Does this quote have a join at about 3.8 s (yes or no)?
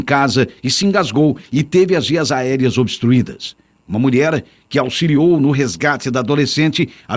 yes